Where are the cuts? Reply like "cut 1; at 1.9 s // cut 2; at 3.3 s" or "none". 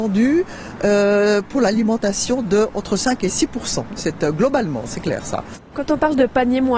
cut 1; at 4.0 s // cut 2; at 5.5 s